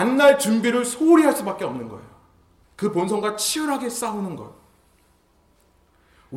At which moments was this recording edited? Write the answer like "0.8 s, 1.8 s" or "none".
2.6 s